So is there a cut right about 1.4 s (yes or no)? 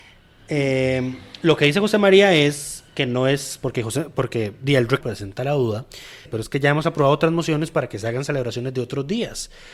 no